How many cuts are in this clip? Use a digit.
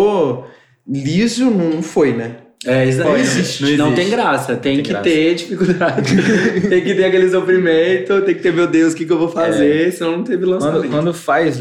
1